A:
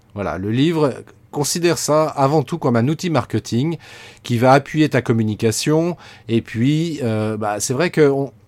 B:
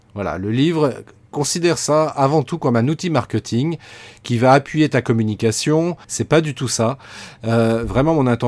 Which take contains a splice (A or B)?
B